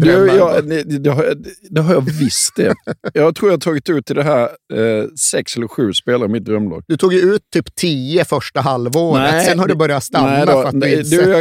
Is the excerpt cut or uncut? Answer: uncut